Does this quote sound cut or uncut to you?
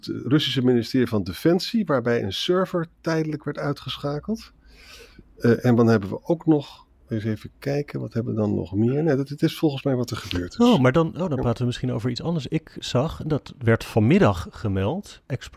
uncut